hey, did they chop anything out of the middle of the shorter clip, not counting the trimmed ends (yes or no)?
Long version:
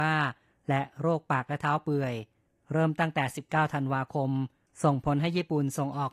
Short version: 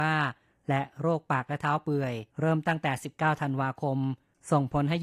yes